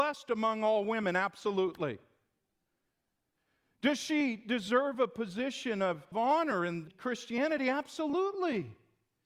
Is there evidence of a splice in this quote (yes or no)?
no